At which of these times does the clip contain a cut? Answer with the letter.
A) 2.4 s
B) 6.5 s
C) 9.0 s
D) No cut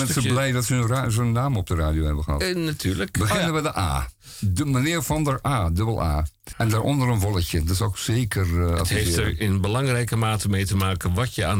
B